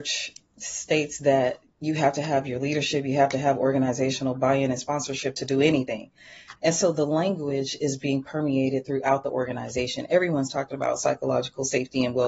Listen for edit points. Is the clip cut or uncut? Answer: cut